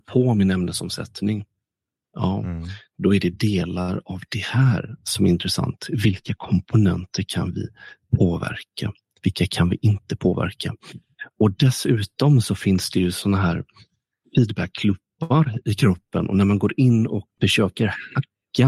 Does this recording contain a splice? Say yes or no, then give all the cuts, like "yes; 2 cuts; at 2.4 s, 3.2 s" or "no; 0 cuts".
yes; 1 cut; at 17.4 s